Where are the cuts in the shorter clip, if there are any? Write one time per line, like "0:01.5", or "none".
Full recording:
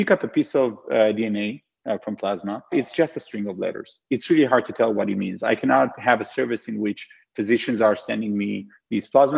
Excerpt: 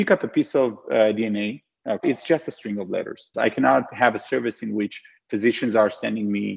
0:02.0
0:03.3